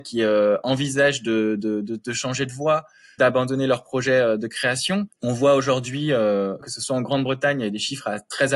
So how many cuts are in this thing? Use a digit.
2